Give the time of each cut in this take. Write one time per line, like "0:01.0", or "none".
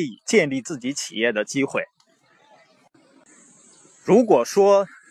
none